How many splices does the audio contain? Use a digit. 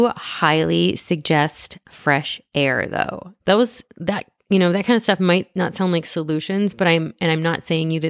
1